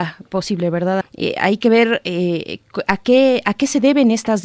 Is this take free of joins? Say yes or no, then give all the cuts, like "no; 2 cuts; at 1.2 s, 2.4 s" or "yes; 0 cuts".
no; 1 cut; at 1.0 s